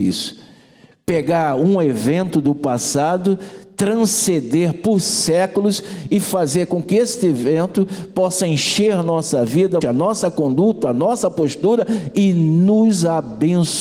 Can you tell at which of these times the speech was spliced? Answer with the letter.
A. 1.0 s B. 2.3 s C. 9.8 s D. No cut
C